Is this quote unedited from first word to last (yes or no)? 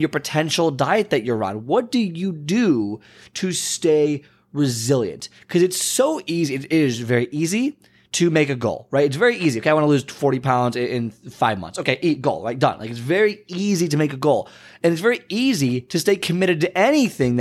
yes